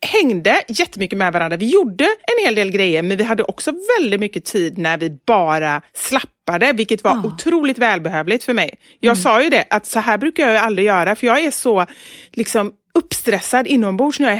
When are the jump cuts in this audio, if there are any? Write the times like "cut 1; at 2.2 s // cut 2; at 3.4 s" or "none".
none